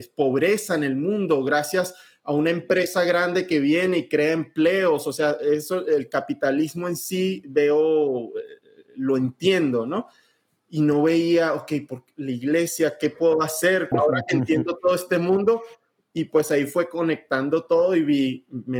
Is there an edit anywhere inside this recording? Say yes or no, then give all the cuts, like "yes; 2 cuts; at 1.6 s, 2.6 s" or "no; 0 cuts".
yes; 1 cut; at 13.9 s